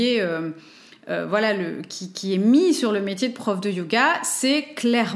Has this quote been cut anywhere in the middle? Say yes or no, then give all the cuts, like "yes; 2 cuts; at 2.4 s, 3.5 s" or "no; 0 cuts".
no; 0 cuts